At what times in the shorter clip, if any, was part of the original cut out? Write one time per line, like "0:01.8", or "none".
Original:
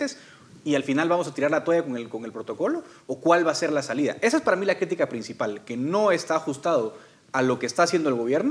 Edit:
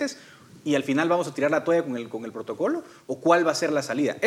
none